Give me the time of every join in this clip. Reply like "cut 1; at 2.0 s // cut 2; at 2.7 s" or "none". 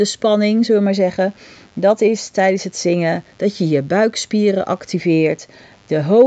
none